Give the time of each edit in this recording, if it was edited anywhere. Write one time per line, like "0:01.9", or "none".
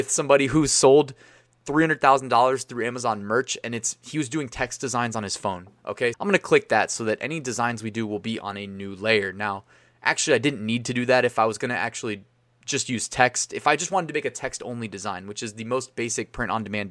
0:06.1